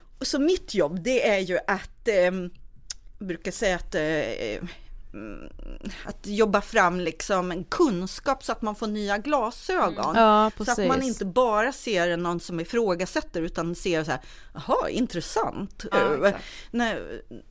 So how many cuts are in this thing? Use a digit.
1